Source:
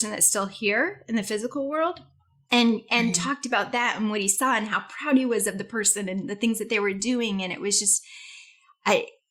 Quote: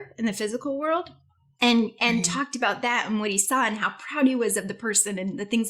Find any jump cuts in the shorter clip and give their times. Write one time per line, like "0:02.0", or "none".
none

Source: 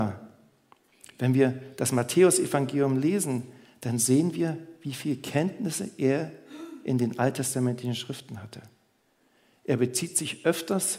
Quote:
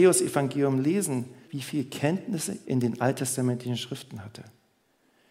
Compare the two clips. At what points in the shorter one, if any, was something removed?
0:01.4
0:02.6

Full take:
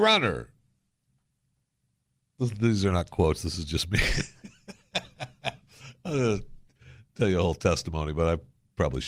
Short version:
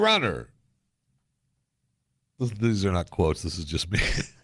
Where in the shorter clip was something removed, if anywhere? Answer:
none

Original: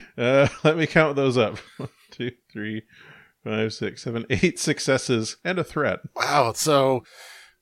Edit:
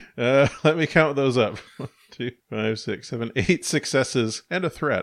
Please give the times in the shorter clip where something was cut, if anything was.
0:02.4

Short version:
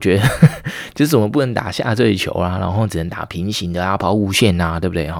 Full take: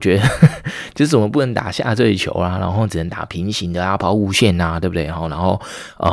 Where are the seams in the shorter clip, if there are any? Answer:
none

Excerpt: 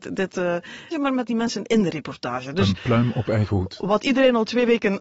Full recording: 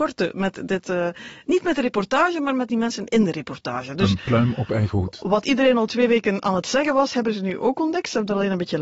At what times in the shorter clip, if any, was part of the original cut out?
0:00.9

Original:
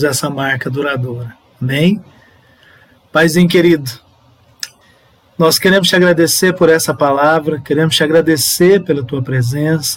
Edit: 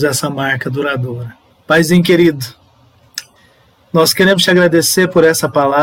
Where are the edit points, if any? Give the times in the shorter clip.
0:01.5

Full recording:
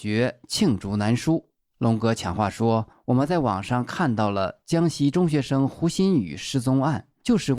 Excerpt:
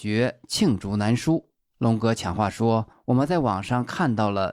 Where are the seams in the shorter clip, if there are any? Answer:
none

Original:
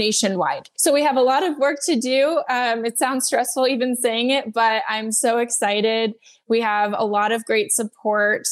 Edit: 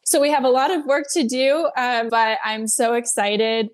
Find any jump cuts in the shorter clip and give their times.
0:02.1

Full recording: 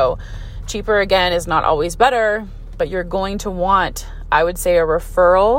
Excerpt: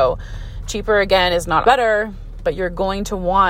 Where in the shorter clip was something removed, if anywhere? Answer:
0:01.6

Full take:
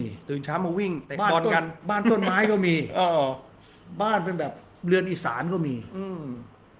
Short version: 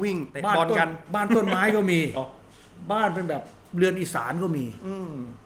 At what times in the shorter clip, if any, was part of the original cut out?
0:02.2

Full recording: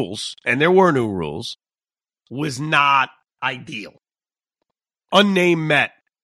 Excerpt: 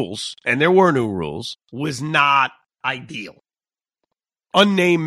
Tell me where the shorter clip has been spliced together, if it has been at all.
0:01.6

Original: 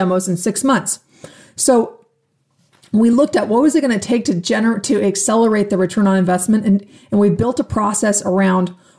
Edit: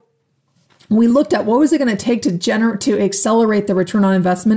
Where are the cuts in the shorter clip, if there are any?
none

